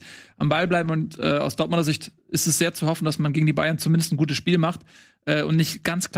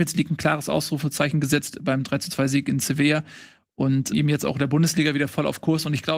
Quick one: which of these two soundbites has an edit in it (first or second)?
second